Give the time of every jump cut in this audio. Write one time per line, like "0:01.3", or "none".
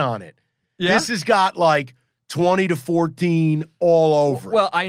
none